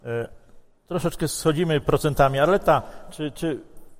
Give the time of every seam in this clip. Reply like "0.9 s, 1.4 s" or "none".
none